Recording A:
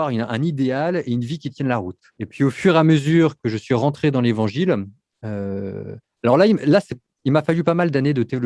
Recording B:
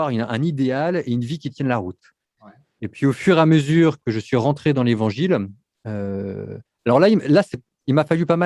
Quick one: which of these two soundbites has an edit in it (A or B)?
A